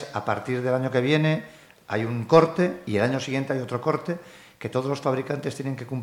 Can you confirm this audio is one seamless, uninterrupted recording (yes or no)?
yes